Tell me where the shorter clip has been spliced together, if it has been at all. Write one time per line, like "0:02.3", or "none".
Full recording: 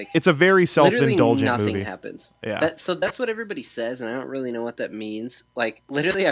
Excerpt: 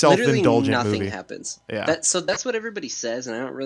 none